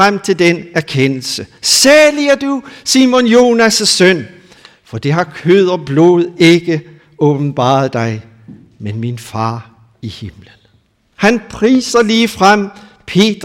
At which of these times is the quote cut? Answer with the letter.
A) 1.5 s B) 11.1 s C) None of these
B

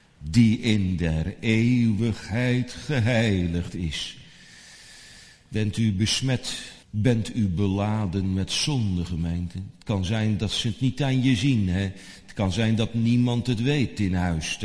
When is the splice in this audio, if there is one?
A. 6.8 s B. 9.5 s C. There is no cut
A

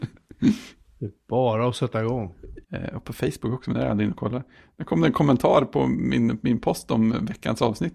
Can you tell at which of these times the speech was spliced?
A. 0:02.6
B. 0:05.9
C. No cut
A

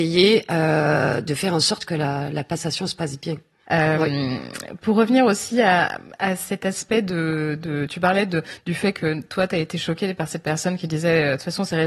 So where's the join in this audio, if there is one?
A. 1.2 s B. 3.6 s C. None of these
B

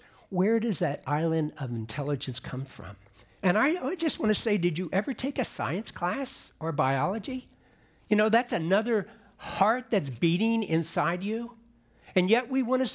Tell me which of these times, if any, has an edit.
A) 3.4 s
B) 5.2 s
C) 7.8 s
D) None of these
A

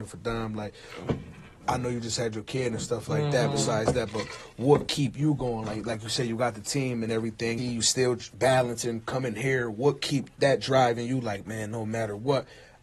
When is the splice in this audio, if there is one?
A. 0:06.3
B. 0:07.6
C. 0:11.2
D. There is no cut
B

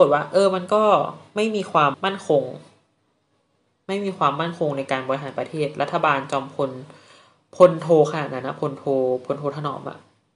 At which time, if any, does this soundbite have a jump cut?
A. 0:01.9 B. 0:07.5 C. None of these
A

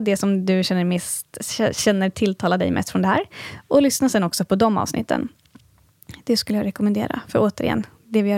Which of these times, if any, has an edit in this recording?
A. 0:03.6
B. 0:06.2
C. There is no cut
C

